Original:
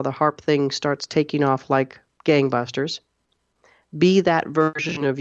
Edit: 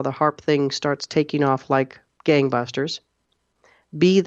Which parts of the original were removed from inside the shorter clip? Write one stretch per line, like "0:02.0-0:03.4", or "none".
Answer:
none